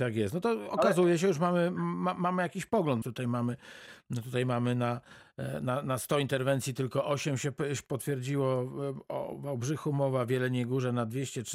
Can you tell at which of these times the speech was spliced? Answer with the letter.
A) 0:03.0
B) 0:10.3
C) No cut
A